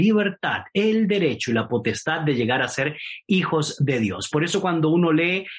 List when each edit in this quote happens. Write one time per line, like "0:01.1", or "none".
none